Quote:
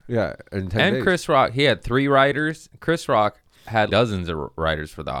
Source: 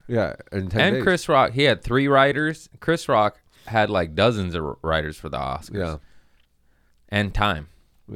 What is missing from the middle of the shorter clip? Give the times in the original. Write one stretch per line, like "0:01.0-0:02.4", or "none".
0:03.9-0:04.1